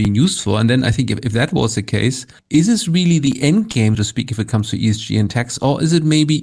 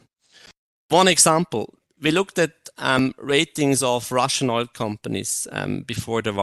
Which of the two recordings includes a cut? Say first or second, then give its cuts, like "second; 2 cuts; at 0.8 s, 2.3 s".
first; 2 cuts; at 2.4 s, 3.9 s